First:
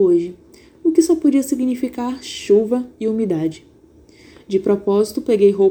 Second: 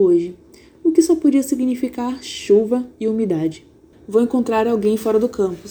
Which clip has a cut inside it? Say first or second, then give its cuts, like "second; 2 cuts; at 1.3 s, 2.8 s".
second; 1 cut; at 3.9 s